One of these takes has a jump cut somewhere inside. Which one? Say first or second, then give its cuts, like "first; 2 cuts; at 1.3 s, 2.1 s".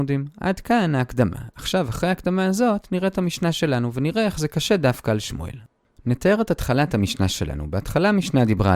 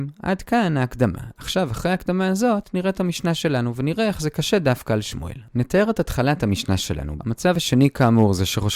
second; 2 cuts; at 5.5 s, 7.2 s